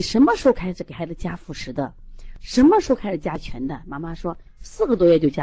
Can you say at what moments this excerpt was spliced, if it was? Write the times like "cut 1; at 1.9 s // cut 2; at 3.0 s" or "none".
none